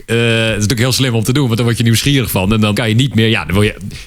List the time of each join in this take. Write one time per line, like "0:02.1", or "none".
0:02.7